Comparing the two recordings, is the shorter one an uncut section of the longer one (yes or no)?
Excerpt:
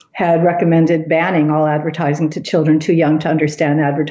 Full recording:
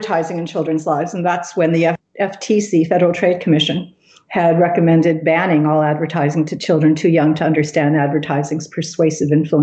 yes